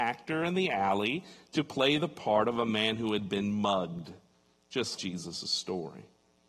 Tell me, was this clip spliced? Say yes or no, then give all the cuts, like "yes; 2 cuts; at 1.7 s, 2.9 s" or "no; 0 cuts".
yes; 1 cut; at 5.0 s